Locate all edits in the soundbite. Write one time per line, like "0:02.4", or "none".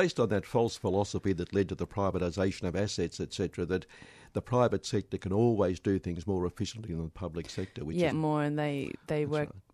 0:08.1